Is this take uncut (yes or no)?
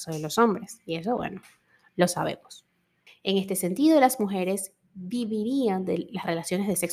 no